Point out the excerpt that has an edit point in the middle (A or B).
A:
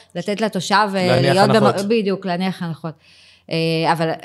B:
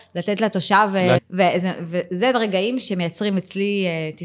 B